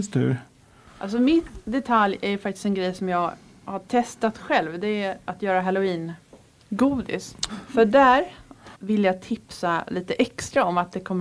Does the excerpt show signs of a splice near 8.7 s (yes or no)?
yes